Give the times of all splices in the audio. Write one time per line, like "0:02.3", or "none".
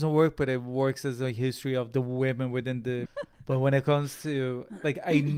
0:03.1